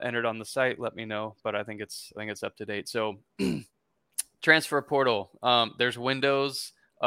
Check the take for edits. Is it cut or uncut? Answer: uncut